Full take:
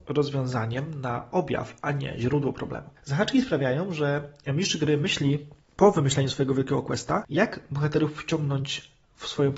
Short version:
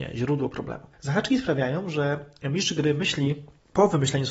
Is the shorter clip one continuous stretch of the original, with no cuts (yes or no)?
yes